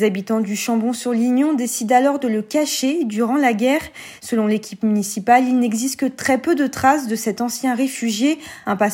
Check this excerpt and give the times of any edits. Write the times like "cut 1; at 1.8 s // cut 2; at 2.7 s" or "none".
cut 1; at 4.2 s